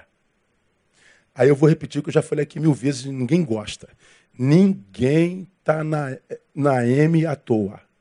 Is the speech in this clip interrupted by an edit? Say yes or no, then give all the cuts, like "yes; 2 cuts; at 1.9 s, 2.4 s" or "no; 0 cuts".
no; 0 cuts